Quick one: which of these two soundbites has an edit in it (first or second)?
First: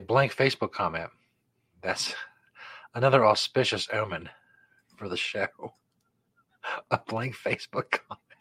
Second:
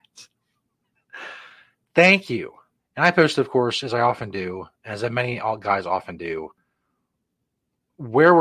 second